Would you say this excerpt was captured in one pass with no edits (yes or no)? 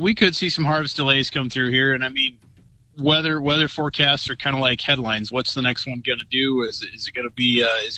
yes